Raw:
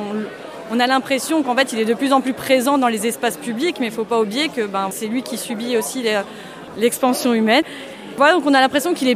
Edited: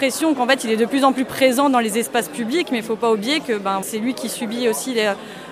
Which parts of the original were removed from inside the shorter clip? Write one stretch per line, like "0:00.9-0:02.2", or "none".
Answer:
none